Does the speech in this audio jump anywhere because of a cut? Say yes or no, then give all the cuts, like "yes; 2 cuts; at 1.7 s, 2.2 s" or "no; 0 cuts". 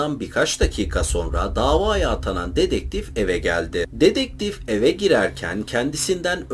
no; 0 cuts